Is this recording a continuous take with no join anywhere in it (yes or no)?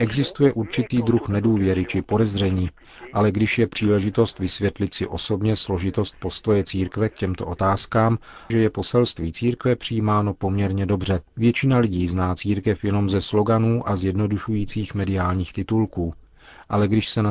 no